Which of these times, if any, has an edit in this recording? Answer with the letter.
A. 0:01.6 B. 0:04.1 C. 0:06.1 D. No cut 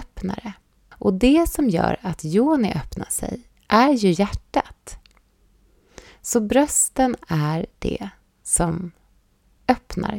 B